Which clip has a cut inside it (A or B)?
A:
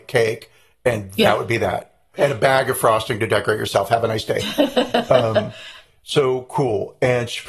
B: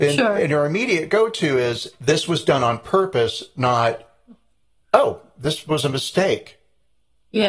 A